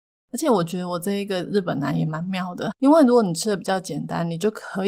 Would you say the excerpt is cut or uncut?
cut